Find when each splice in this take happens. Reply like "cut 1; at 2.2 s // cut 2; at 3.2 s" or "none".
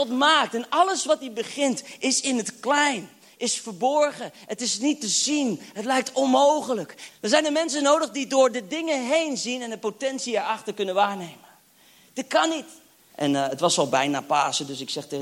cut 1; at 7.1 s // cut 2; at 13.1 s